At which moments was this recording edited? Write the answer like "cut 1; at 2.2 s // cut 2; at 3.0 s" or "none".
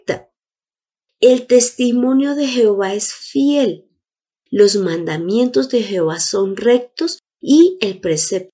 none